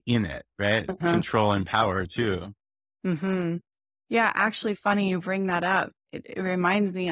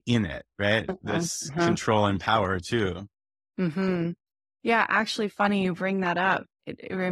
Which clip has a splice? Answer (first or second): first